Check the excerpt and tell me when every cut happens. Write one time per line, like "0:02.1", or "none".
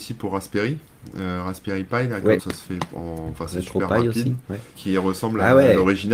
0:02.4
0:04.7

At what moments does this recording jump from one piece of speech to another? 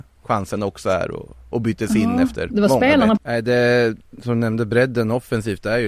0:03.2
0:04.2

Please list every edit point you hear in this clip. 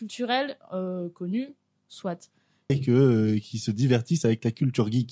0:02.7

